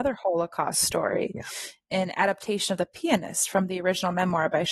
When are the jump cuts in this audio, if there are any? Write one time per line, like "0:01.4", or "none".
none

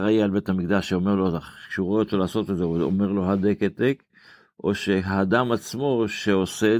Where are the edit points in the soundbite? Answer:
none

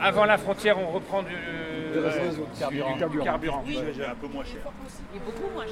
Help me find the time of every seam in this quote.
none

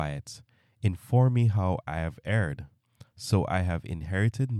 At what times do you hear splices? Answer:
0:03.1

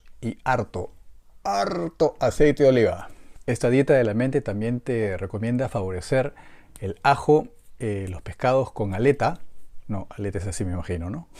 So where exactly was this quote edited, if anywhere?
none

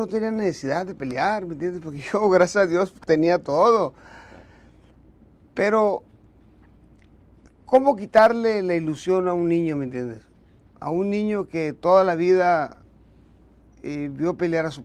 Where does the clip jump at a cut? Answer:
none

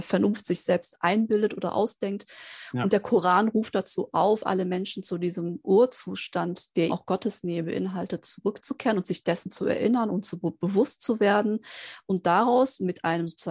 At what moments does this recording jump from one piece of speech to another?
0:06.9

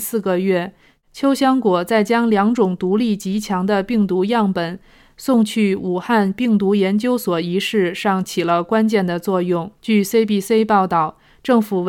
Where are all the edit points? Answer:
0:09.8

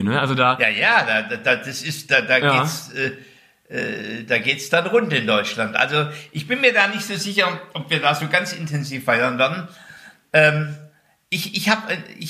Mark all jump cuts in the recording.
none

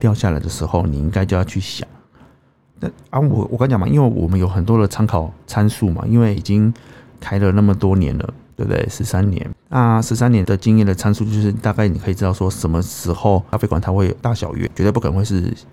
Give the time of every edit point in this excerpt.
0:10.4

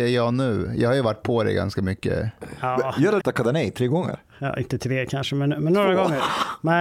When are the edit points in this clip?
0:03.2

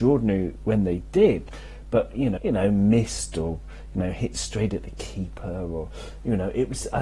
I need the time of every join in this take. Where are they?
0:02.4

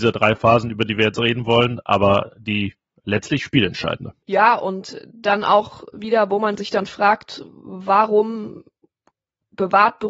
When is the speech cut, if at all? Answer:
none

